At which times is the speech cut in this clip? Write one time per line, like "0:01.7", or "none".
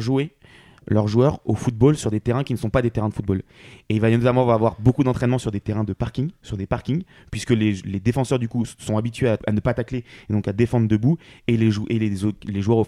0:09.4